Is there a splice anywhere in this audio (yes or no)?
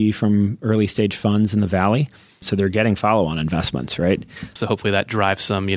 yes